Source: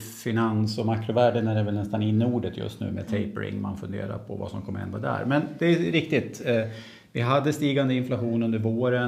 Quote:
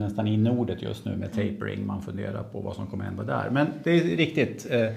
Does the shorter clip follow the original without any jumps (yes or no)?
yes